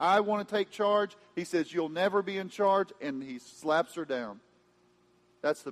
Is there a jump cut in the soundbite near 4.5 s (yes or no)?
no